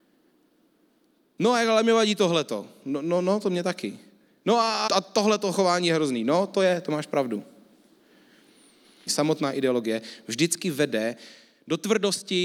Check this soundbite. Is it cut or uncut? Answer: cut